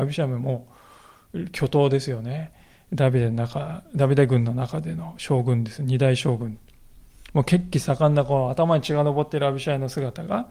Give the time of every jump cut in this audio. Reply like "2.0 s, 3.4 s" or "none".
none